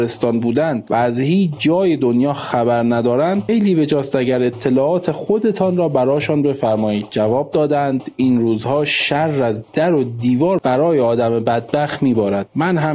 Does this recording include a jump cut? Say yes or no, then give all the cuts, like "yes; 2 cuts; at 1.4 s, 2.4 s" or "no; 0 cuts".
yes; 1 cut; at 3.5 s